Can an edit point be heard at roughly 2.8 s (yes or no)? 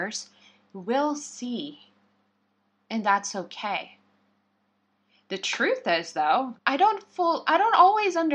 no